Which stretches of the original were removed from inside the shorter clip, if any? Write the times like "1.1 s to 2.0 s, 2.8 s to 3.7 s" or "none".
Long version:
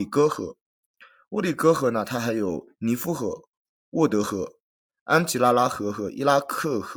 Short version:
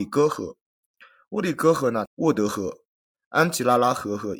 2.1 s to 3.8 s